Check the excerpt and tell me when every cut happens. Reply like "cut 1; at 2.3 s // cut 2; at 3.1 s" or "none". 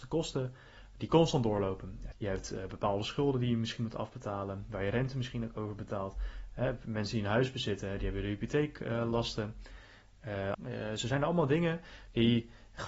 cut 1; at 2.1 s // cut 2; at 10.5 s